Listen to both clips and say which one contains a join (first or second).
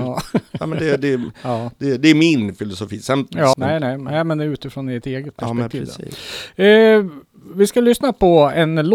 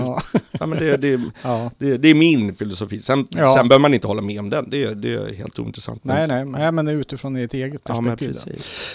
first